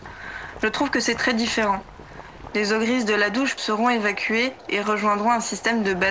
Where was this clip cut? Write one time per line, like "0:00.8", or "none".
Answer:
0:02.5
0:03.6